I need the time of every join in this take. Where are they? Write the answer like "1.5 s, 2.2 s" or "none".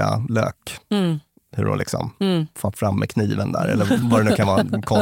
2.7 s, 4.0 s